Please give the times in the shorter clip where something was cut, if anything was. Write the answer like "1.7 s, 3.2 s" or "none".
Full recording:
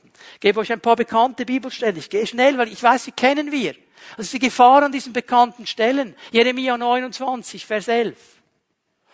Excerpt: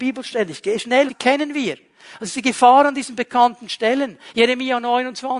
1.1 s